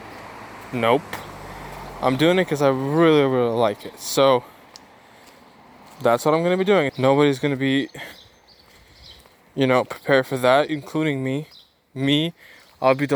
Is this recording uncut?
no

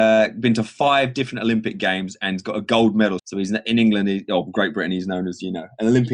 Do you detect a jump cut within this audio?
yes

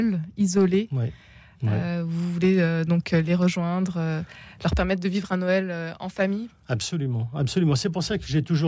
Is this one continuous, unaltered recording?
yes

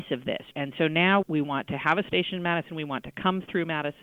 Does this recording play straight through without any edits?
no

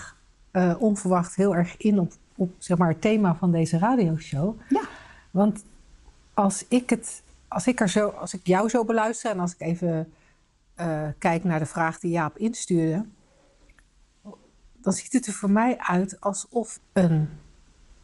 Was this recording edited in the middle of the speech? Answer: yes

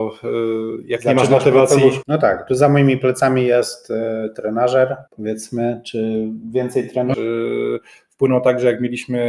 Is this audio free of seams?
no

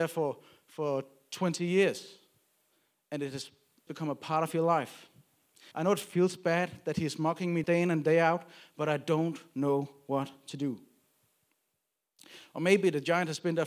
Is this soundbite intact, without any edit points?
no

